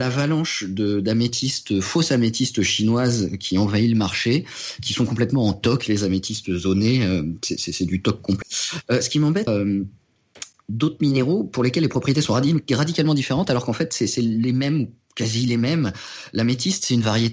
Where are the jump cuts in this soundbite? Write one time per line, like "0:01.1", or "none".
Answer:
0:08.4
0:09.5